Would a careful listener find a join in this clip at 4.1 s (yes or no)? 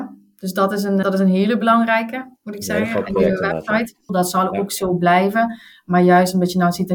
yes